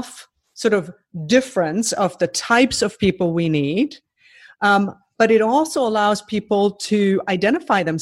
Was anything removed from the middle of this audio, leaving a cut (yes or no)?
no